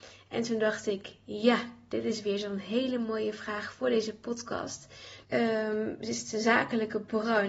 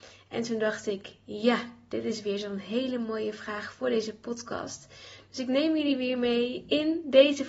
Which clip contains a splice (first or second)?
first